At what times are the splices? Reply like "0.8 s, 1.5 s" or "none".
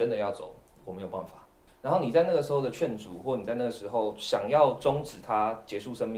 1.7 s

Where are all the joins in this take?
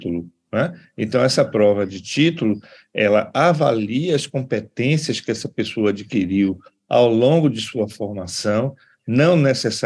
none

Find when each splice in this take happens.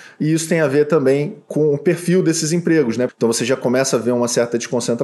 3.1 s

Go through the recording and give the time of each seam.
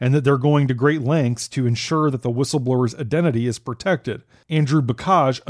4.4 s

